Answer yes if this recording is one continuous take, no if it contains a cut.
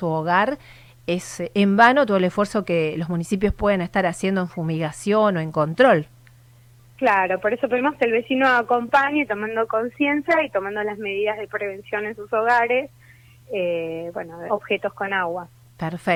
no